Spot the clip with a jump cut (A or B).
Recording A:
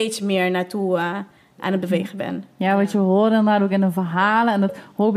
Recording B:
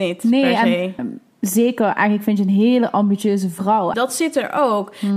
B